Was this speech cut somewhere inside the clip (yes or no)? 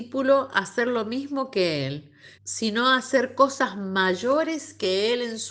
yes